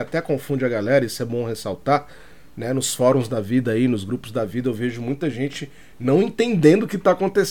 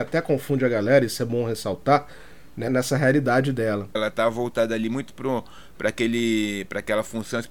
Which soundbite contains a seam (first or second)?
second